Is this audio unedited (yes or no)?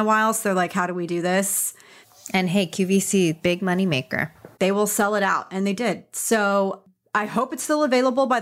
yes